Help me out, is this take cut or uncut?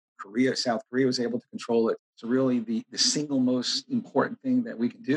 cut